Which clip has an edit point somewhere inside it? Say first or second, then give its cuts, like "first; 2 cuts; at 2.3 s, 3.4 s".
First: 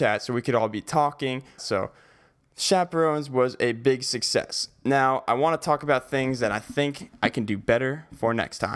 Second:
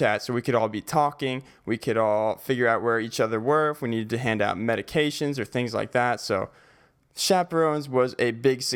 first; 1 cut; at 1.6 s